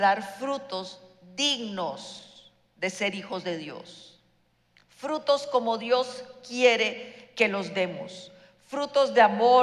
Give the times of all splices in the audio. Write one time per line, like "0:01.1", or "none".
none